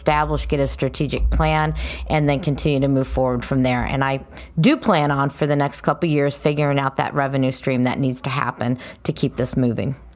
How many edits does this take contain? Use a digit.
0